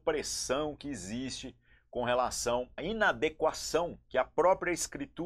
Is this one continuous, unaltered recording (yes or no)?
no